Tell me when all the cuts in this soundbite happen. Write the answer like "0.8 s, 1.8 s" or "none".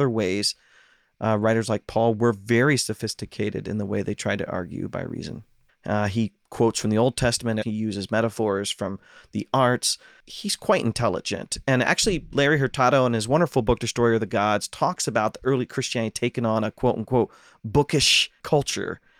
5.7 s, 7.6 s